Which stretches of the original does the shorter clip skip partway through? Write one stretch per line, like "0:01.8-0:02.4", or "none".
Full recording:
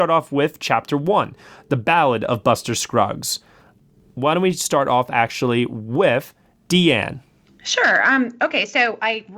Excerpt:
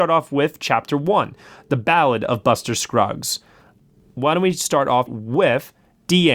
0:05.1-0:05.7